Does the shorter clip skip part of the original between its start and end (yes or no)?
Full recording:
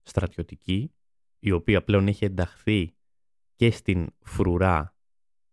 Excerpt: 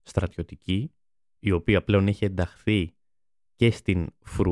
no